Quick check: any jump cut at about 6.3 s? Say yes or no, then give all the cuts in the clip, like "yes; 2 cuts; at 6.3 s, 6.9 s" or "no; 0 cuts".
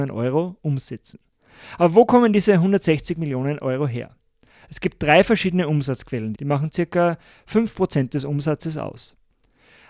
yes; 1 cut; at 6.3 s